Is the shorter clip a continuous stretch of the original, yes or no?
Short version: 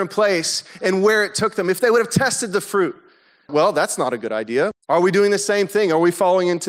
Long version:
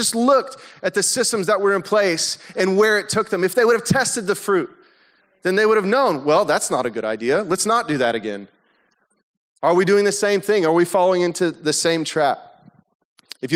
no